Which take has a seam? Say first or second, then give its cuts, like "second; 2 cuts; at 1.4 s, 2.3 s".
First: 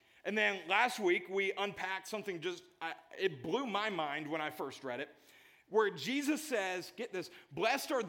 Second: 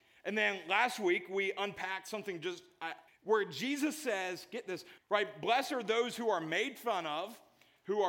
second; 2 cuts; at 3.1 s, 5.0 s